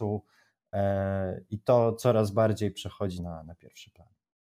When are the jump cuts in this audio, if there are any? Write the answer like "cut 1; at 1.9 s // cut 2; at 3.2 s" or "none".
cut 1; at 3.2 s